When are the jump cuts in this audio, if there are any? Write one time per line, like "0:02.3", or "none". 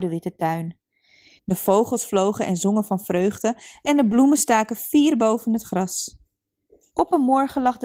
0:01.4
0:06.9